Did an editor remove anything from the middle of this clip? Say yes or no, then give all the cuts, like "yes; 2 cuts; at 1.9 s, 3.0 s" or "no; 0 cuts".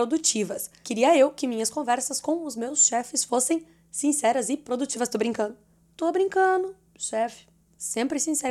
no; 0 cuts